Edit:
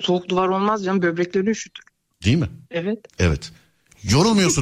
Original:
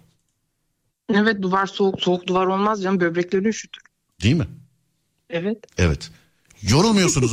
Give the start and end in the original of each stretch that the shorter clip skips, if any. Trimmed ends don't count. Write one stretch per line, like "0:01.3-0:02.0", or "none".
0:04.6-0:05.2